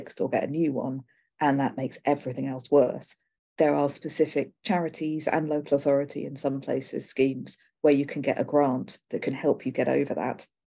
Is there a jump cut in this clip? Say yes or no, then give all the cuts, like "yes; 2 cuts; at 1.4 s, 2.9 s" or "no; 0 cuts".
no; 0 cuts